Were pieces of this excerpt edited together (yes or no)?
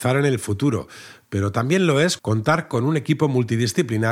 yes